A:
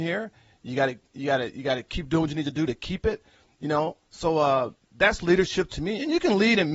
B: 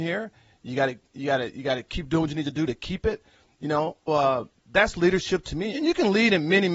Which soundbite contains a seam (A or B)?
B